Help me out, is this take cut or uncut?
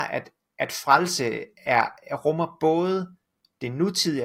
uncut